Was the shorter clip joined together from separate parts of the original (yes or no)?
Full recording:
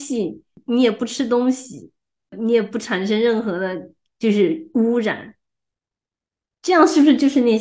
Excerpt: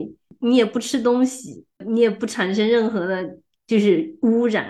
yes